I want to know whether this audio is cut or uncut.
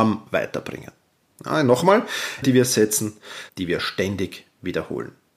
cut